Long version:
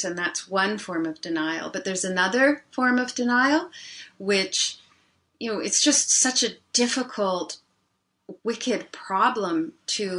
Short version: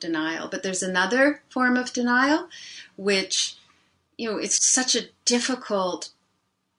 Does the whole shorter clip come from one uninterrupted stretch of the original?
no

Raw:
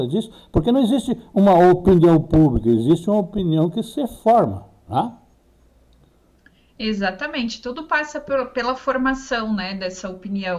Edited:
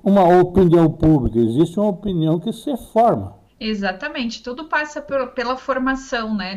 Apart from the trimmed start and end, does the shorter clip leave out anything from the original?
yes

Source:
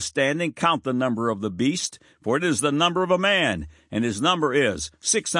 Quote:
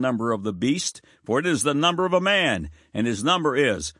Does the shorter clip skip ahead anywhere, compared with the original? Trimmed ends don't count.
no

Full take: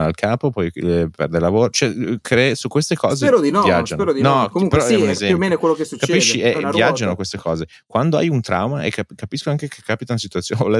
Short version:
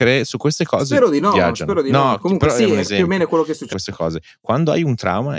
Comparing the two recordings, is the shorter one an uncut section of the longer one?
no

